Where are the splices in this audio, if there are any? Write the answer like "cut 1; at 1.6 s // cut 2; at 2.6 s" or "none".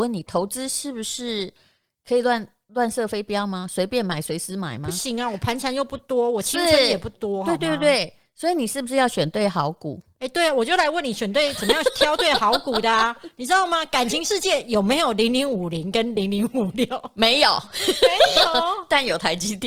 none